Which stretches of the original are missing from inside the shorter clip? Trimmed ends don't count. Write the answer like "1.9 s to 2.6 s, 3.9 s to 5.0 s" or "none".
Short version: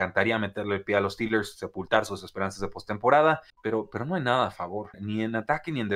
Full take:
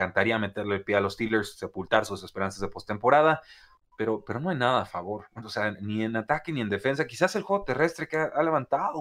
3.5 s to 3.8 s, 5.3 s to 5.7 s